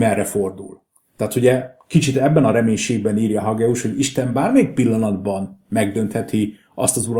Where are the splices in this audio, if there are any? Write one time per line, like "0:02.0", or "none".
none